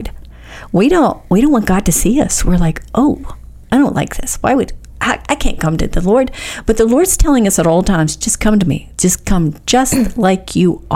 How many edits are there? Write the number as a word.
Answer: one